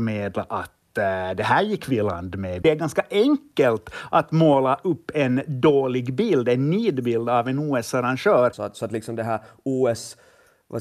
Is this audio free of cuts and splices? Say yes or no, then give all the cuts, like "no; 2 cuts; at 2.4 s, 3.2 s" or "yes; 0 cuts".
no; 2 cuts; at 2.6 s, 8.5 s